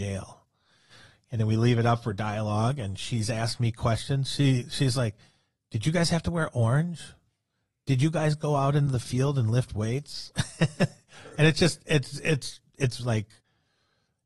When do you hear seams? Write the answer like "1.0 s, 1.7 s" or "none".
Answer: none